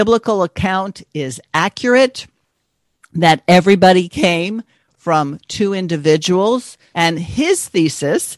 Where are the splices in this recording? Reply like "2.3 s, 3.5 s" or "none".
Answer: 6.9 s